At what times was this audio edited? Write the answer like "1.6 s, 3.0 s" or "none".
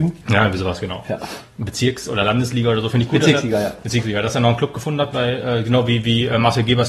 none